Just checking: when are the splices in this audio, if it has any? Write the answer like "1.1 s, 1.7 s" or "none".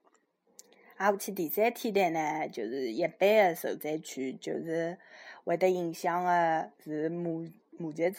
none